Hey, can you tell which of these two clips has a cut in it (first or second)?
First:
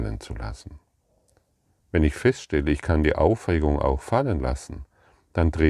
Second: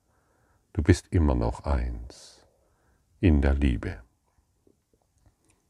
first